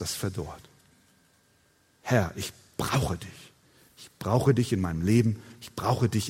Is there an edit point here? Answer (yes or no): yes